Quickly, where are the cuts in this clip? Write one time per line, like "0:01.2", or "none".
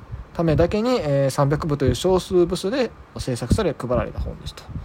0:03.2